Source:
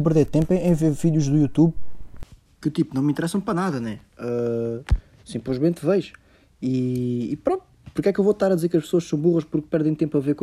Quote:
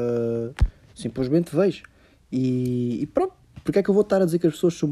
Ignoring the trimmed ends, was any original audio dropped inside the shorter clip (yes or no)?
no